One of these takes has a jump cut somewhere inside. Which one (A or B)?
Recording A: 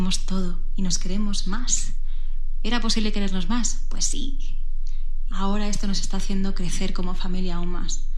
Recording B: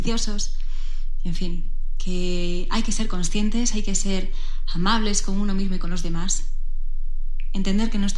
A